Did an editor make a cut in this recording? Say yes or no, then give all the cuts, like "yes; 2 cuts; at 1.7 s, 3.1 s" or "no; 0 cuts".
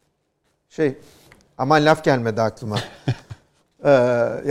no; 0 cuts